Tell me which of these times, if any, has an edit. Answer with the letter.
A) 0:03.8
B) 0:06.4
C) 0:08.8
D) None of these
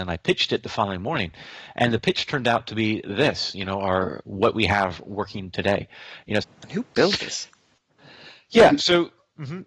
B